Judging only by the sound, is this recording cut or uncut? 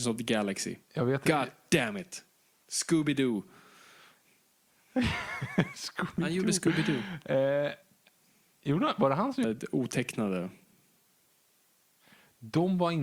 cut